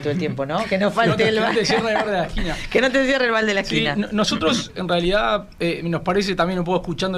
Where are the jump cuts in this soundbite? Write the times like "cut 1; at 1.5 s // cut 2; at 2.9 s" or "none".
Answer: none